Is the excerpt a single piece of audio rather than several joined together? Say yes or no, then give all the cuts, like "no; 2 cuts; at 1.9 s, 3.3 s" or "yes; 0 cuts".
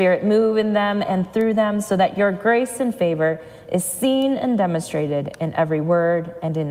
yes; 0 cuts